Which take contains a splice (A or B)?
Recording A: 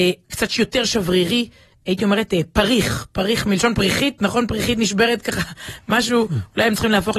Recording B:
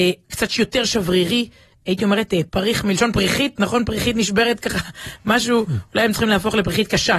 B